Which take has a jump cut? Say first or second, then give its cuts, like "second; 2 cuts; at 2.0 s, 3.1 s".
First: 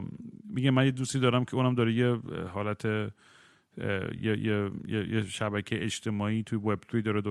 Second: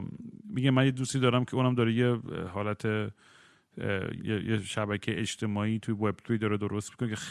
second; 1 cut; at 4.2 s